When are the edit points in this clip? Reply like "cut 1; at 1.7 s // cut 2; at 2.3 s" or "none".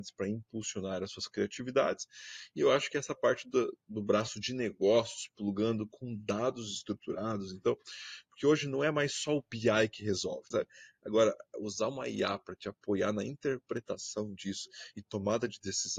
cut 1; at 10.5 s